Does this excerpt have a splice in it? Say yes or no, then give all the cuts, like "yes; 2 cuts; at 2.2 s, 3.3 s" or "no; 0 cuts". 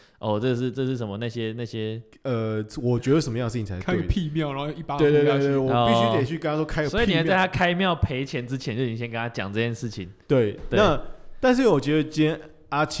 yes; 2 cuts; at 2.1 s, 10.2 s